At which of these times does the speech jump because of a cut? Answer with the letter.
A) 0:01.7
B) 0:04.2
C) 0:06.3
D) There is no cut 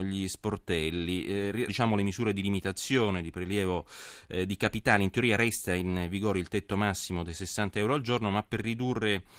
A